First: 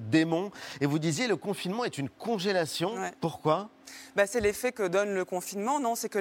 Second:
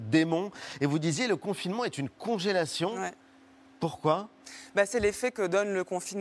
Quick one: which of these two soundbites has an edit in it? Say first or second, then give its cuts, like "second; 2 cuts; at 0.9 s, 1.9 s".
first; 1 cut; at 3.2 s